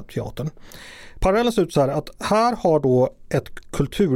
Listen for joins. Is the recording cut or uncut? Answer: uncut